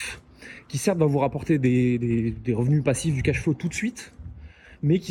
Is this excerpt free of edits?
yes; 0 cuts

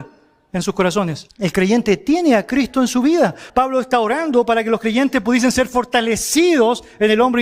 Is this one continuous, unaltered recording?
no; 2 cuts; at 1.3 s, 3.5 s

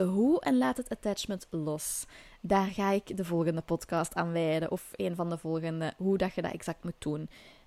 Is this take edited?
no; 0 cuts

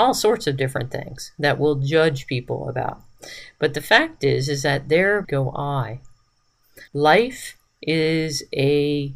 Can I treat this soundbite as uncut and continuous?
no; 2 cuts; at 5.2 s, 6.9 s

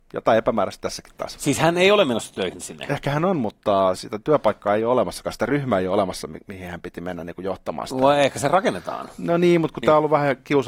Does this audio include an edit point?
no; 0 cuts

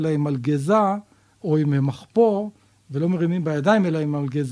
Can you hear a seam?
no; 0 cuts

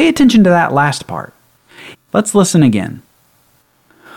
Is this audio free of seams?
no; 1 cut; at 1.9 s

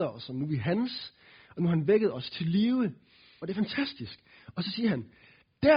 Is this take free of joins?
no; 1 cut; at 3.4 s

